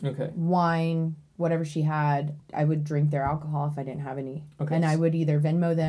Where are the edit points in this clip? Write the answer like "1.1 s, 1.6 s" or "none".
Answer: none

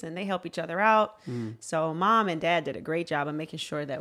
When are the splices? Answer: none

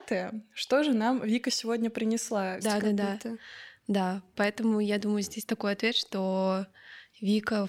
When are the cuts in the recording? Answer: 2.6 s

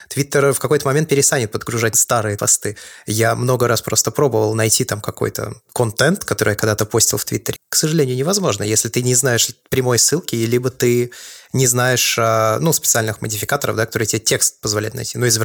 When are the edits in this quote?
7.6 s

